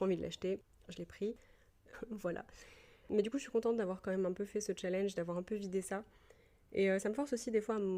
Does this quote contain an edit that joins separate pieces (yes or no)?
yes